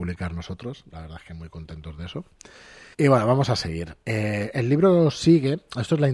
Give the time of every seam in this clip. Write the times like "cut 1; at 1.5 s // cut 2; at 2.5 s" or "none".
cut 1; at 2.9 s